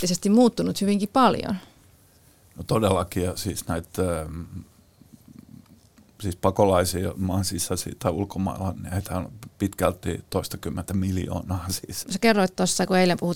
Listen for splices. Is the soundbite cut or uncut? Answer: cut